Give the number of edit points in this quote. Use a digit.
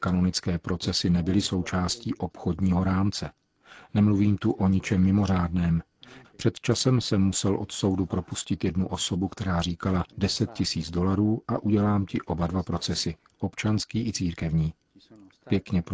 2